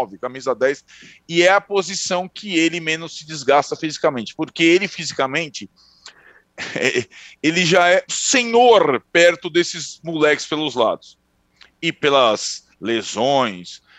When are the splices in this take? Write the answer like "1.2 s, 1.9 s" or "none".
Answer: 8.1 s